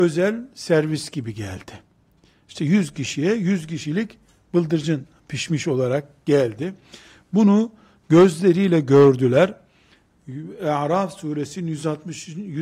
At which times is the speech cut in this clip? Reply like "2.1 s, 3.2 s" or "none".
none

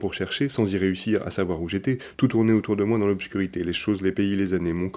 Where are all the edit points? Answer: none

